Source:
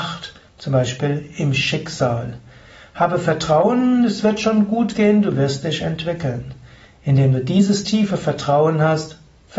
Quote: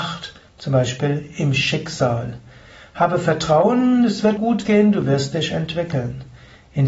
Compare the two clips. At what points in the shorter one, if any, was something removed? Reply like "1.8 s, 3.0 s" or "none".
4.4 s